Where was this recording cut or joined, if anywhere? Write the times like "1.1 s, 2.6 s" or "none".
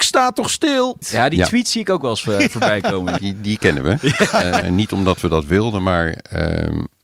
1.0 s, 3.2 s, 4.6 s